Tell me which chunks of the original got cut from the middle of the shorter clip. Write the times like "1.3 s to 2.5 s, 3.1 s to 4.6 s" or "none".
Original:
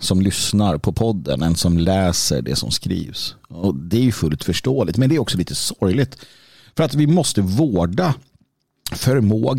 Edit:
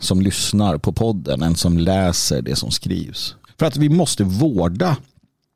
3.5 s to 6.6 s

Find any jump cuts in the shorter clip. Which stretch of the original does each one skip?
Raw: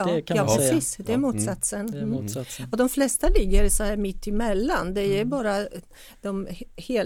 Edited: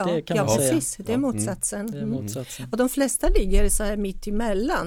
none

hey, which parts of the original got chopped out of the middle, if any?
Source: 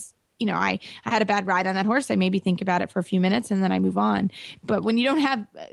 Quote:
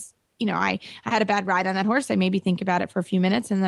none

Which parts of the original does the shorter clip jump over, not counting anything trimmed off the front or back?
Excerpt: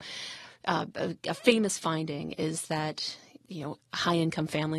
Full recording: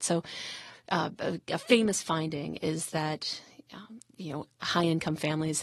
3.6 s to 4.1 s

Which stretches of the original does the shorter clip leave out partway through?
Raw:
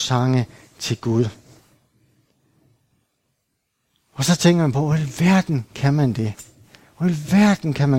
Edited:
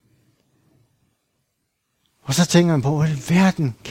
none

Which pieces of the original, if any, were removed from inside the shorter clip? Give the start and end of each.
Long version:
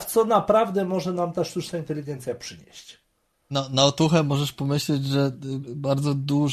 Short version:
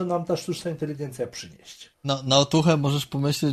3.0 s to 3.4 s

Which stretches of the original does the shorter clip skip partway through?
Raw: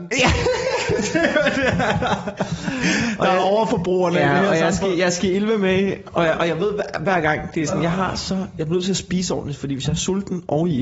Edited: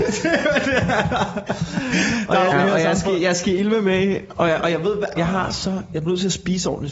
3.4 s to 4.3 s, 6.9 s to 7.8 s

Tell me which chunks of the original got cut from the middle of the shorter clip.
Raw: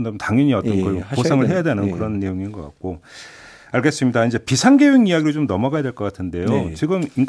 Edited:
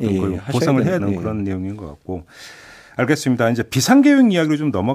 1.6 s to 1.7 s

